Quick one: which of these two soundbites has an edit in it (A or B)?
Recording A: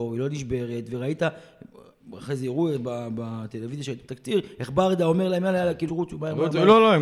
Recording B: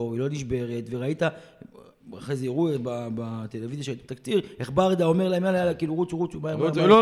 A